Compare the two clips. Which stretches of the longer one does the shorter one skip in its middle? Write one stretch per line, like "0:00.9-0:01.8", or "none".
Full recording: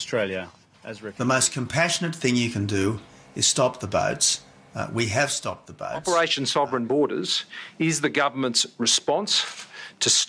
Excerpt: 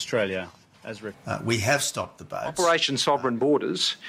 0:01.1-0:04.6